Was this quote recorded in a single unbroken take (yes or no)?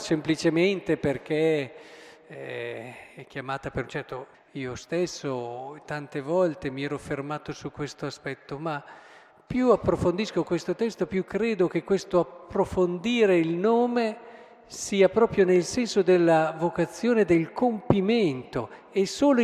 no